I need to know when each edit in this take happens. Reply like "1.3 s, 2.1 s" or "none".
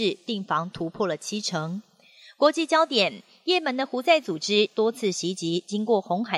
none